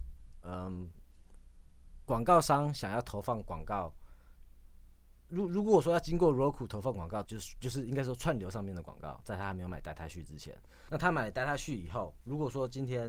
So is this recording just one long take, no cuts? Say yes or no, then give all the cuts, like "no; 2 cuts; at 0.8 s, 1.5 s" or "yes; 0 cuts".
no; 3 cuts; at 5.2 s, 7.2 s, 10.9 s